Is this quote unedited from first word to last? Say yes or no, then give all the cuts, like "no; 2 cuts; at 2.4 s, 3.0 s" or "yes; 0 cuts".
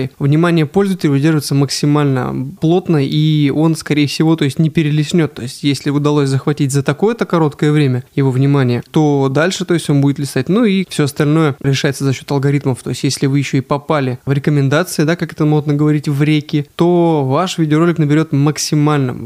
yes; 0 cuts